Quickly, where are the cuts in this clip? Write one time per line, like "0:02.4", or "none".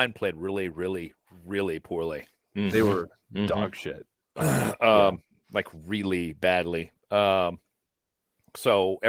none